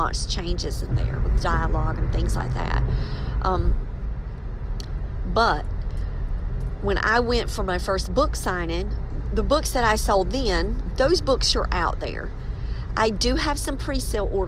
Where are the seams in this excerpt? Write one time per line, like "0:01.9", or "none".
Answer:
0:10.9